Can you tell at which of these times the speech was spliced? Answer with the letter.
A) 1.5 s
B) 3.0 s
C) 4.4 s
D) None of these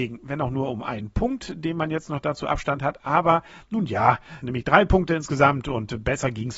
C